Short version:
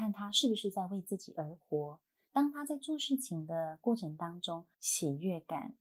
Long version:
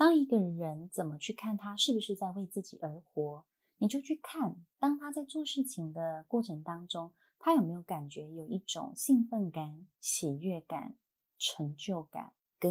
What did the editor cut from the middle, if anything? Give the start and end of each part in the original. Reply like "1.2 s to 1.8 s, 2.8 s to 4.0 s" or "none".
3.7 s to 4.7 s, 7.2 s to 9.9 s